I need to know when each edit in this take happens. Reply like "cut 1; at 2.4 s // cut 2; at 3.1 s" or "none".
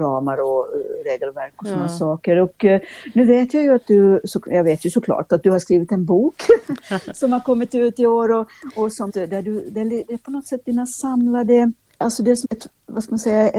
cut 1; at 9.1 s // cut 2; at 12.4 s